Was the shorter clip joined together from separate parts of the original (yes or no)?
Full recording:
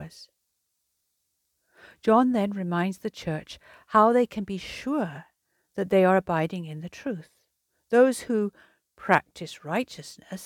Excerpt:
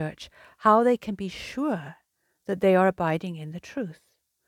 no